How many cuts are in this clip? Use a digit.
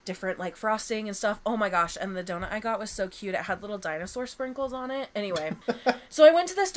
1